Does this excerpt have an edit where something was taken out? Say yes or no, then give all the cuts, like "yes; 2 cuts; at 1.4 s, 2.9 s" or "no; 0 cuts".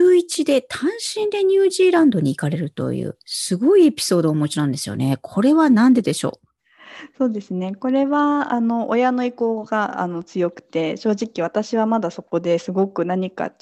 no; 0 cuts